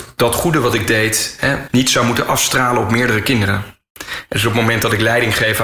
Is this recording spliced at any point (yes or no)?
yes